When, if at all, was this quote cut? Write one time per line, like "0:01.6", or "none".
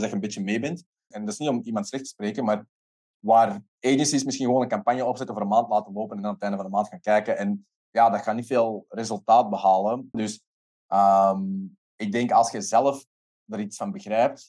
0:01.1
0:10.1

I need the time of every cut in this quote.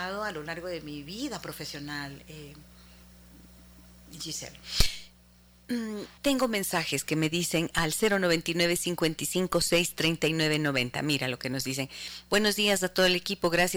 0:06.2

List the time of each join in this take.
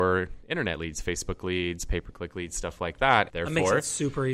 0:03.3

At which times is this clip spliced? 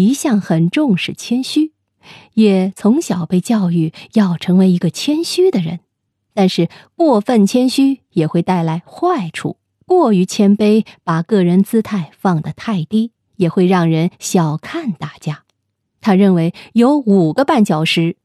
0:13.2
0:16.0

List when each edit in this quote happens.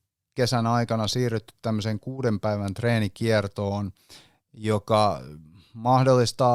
none

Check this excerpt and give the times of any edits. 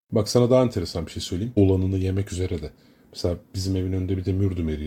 0:01.6

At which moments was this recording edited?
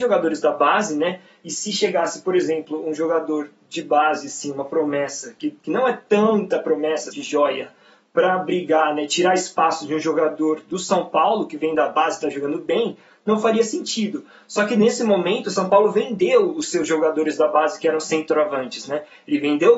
0:07.1

